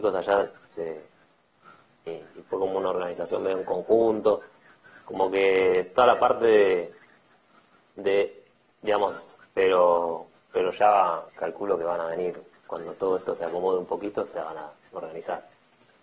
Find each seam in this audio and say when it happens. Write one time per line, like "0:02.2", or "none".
0:02.1
0:09.4
0:11.3